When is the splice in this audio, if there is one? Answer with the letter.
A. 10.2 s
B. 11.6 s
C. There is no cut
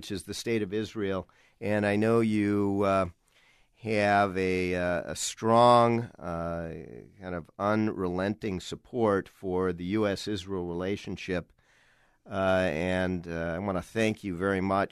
C